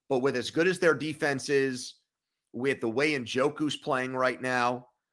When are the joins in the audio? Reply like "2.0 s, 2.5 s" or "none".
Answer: none